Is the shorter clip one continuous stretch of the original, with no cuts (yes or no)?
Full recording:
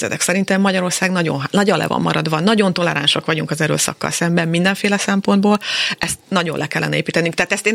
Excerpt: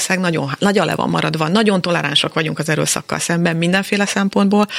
yes